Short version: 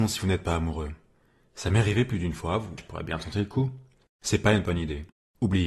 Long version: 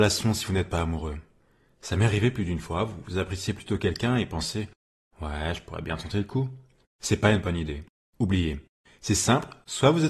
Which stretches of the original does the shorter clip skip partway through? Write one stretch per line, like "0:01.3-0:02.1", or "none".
0:03.0-0:05.6